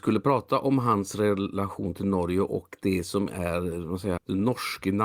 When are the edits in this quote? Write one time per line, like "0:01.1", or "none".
0:04.2